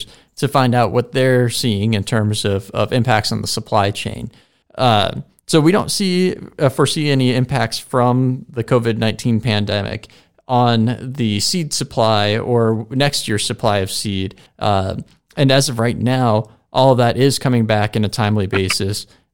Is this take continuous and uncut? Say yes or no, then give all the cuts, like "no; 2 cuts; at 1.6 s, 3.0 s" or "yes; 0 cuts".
no; 2 cuts; at 4.6 s, 14.5 s